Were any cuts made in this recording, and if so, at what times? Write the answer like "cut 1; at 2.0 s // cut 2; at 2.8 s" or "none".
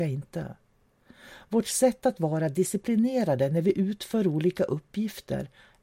none